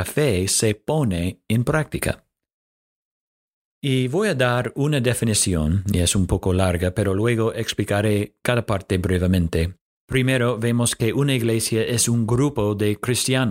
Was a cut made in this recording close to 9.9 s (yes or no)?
yes